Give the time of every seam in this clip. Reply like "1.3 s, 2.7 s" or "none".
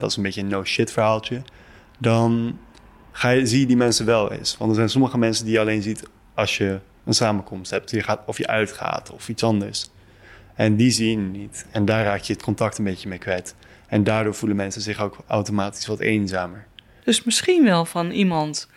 17.0 s